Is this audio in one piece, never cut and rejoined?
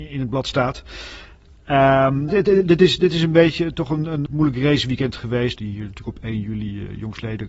no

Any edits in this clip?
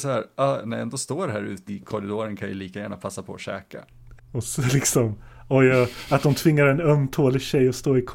yes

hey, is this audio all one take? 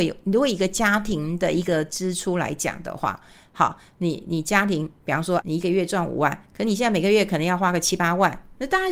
no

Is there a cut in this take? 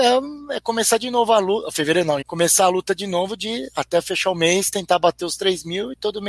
yes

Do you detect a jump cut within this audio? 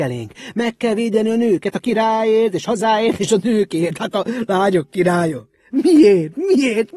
yes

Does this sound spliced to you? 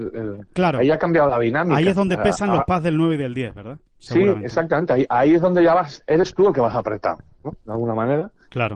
no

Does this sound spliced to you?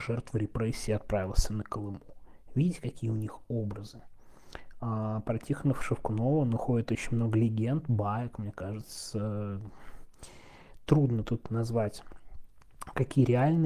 no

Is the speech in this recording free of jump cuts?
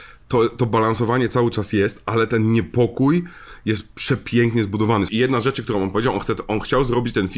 no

